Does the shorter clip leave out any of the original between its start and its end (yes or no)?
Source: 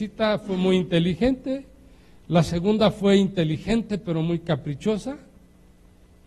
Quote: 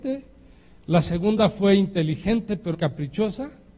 yes